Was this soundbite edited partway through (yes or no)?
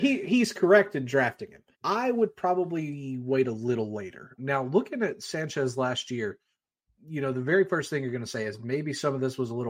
yes